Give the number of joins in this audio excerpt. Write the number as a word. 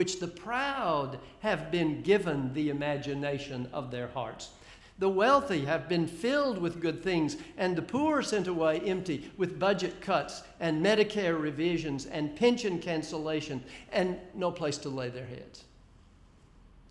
one